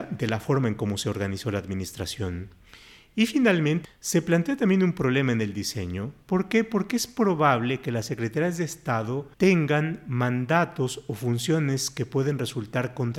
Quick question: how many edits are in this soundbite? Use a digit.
2